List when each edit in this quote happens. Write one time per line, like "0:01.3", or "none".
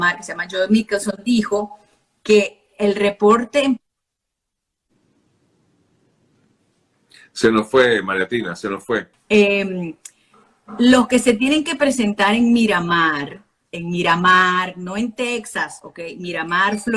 0:09.1